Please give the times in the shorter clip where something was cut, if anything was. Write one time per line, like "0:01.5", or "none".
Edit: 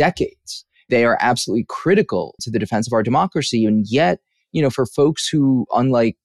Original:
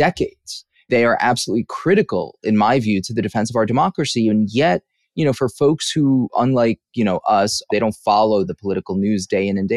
0:02.4